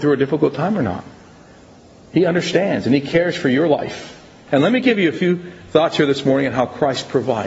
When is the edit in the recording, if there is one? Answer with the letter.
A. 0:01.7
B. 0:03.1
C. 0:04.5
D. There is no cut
C